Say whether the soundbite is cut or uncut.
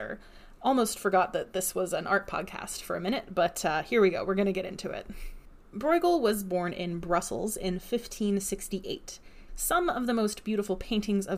cut